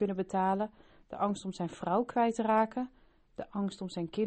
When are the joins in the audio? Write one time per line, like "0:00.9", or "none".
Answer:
none